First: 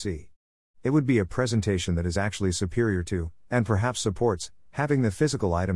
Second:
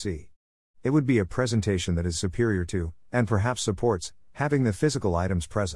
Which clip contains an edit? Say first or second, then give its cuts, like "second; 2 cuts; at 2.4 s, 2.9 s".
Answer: second; 1 cut; at 2.1 s